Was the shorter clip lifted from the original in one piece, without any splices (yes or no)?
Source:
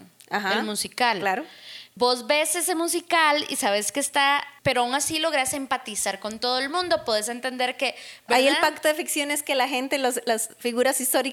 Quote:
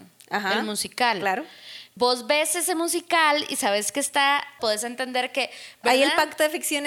no